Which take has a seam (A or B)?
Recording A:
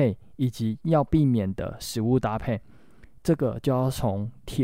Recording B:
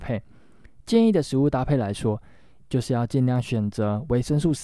A